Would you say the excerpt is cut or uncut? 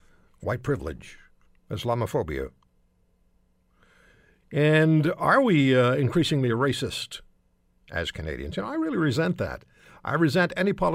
cut